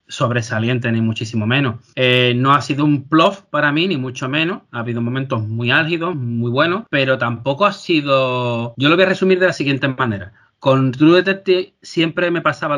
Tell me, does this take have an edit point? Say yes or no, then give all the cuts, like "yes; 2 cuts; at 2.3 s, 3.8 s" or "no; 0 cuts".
no; 0 cuts